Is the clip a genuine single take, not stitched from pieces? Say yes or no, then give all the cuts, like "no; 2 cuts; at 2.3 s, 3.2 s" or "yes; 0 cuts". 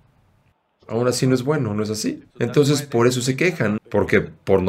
no; 2 cuts; at 2.3 s, 3.8 s